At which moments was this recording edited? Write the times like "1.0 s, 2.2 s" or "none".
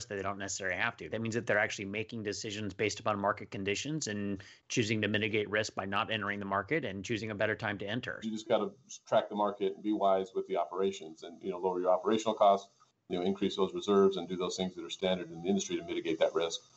1.1 s, 8.2 s